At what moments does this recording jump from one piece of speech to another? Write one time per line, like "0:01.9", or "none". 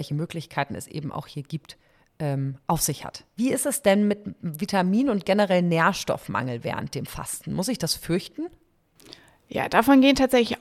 0:03.4